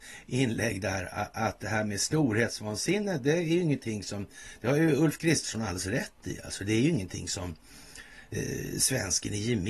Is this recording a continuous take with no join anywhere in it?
yes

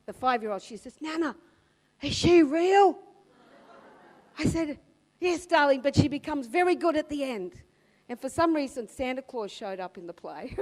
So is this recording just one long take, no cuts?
yes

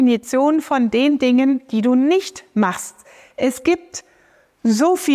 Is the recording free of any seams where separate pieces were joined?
yes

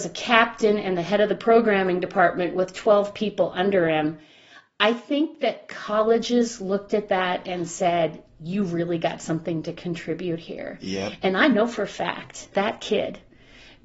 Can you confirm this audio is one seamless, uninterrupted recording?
no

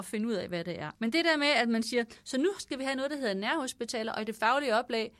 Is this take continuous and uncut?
no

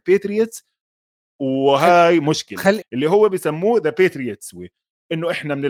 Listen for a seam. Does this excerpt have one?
yes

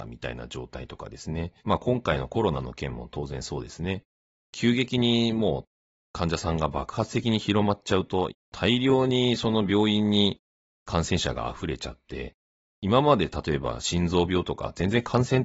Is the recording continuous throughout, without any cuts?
no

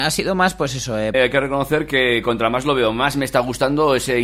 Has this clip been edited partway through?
yes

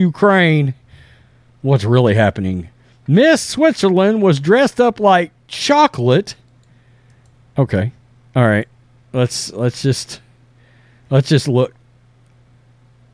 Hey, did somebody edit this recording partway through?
no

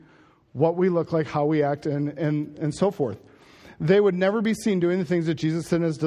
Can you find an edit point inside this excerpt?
no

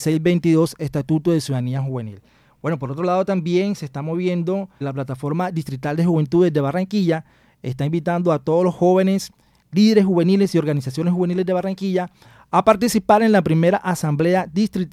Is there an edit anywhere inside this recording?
yes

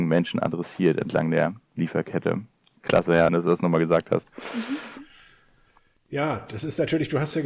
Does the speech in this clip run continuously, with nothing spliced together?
no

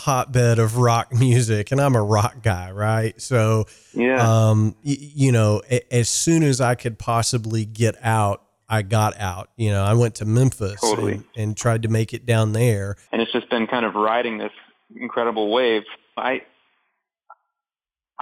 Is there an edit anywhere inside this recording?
yes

